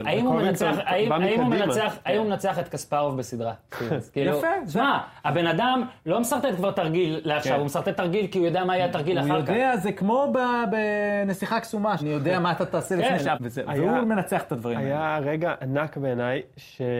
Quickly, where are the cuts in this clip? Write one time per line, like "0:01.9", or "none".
0:12.0
0:13.3